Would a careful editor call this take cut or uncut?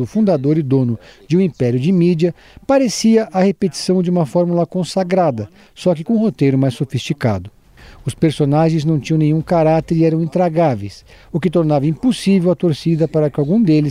uncut